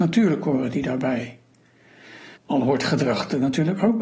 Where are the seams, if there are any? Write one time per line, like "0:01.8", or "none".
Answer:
0:02.4